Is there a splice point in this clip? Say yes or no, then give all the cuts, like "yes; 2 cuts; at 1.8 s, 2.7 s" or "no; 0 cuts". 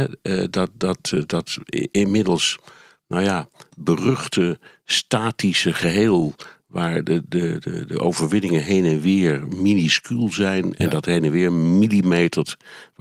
no; 0 cuts